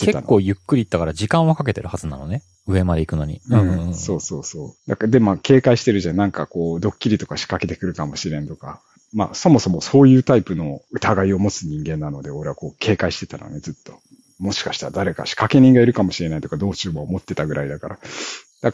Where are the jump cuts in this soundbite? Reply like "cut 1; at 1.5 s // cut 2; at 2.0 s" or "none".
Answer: none